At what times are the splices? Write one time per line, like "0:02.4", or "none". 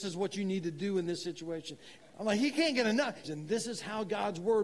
0:02.0
0:03.2